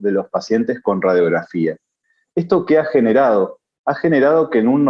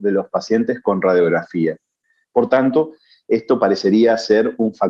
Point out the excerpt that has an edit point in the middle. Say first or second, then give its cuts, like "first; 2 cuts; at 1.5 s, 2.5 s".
second; 1 cut; at 2.2 s